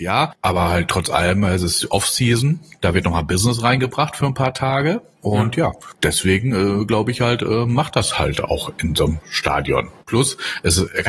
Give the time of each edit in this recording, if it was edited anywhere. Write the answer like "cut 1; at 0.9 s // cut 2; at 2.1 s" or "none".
cut 1; at 10.0 s